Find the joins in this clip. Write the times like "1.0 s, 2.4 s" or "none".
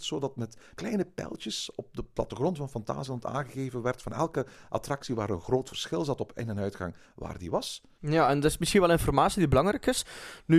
8.0 s